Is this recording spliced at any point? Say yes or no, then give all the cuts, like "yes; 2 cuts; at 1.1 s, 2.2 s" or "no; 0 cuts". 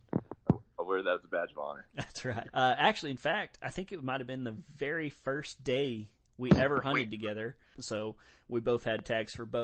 yes; 2 cuts; at 2.5 s, 7.7 s